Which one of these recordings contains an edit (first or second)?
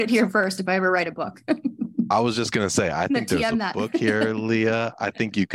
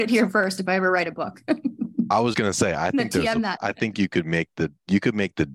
second